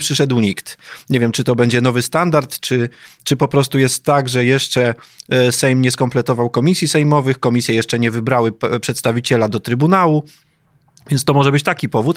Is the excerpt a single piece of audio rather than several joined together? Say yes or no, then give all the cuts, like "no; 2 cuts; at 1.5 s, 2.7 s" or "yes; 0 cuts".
yes; 0 cuts